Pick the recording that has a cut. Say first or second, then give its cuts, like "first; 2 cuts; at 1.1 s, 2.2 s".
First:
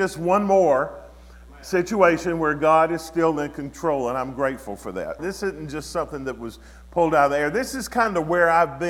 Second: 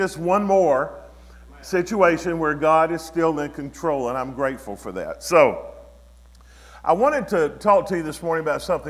first; 1 cut; at 5.2 s